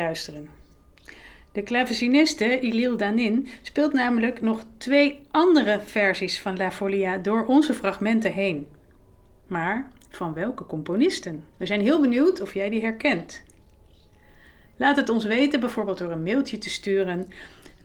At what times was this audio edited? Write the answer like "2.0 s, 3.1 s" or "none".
11.5 s